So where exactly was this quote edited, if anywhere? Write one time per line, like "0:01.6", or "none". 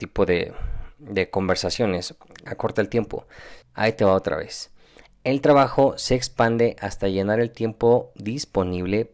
0:02.5
0:03.6